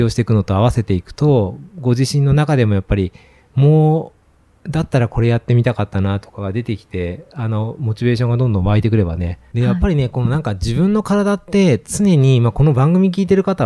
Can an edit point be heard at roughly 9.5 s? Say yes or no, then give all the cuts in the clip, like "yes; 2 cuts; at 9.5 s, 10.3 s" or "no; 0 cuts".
yes; 1 cut; at 9.5 s